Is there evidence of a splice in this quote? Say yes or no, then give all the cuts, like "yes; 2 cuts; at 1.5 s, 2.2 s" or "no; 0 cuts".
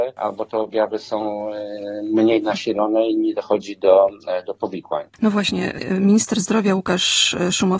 no; 0 cuts